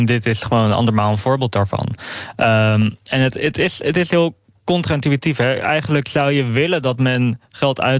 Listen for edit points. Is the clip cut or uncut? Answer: uncut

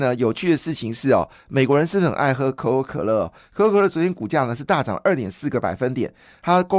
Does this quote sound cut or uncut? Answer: uncut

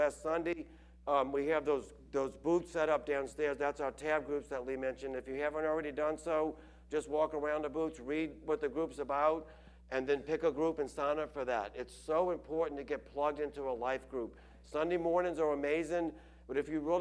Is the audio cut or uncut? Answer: uncut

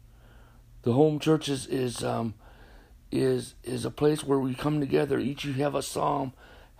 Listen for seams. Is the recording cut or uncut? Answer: uncut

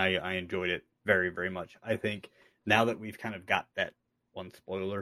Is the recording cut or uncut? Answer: cut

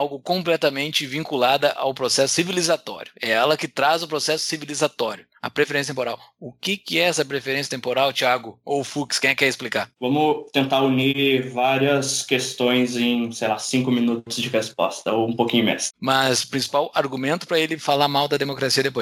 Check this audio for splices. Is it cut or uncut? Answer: cut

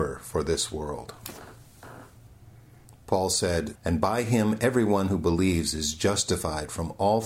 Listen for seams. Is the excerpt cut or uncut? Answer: cut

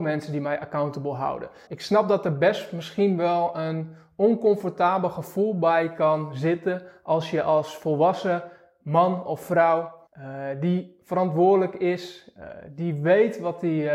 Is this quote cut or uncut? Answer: cut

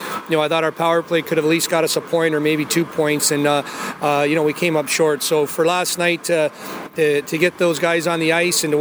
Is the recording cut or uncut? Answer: uncut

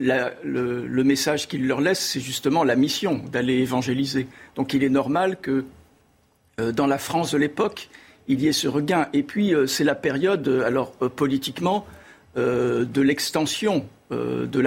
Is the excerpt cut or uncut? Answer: uncut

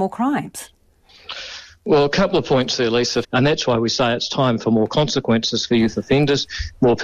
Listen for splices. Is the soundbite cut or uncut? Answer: cut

